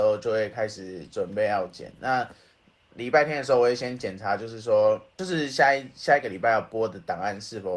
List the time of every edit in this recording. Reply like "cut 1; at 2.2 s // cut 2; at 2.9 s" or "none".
none